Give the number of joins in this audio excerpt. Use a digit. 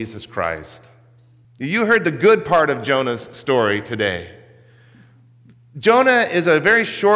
1